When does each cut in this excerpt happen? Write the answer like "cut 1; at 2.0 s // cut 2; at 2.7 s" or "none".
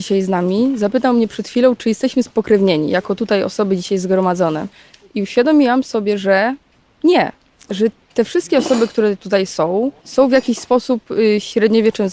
cut 1; at 10.0 s